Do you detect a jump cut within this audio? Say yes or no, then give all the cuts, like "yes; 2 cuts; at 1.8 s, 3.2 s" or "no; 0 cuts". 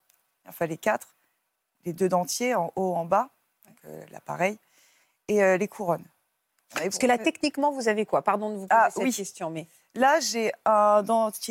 no; 0 cuts